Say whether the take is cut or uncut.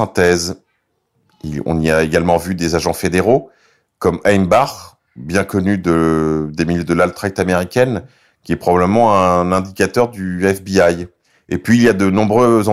uncut